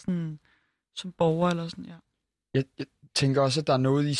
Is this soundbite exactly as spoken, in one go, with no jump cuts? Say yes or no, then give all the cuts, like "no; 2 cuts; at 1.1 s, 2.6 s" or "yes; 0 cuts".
yes; 0 cuts